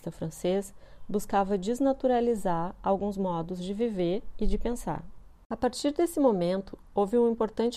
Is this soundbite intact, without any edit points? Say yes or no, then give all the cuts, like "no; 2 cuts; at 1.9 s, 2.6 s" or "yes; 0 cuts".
yes; 0 cuts